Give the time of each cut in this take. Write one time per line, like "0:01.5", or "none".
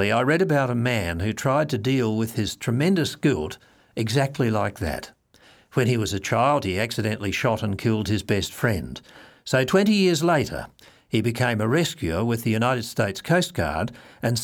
none